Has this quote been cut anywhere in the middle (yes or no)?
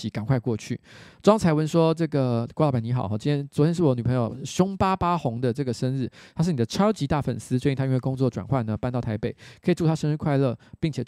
no